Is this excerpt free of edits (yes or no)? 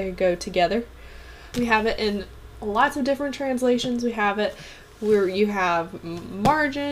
no